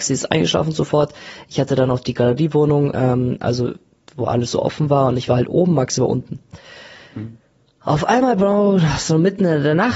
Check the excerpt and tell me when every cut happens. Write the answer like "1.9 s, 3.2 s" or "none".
none